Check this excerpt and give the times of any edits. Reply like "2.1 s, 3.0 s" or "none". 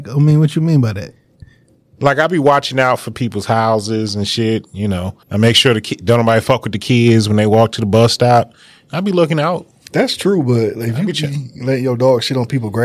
5.2 s